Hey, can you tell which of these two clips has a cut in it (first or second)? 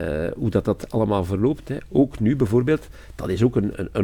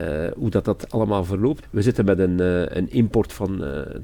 second